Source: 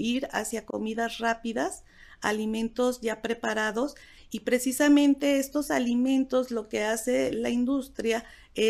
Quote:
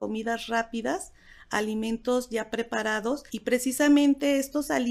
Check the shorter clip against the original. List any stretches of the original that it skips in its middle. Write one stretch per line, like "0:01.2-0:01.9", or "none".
0:04.0-0:04.3